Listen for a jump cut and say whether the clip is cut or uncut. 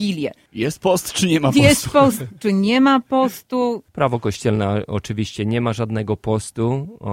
cut